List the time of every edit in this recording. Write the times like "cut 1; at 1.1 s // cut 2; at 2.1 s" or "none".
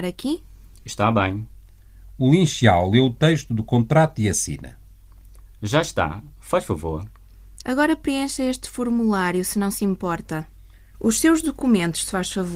cut 1; at 7.6 s // cut 2; at 10.9 s